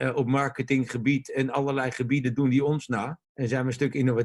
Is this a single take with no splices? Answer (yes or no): no